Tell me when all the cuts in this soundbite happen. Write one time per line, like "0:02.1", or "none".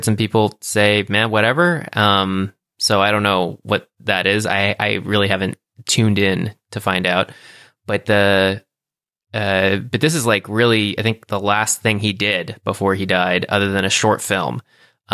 none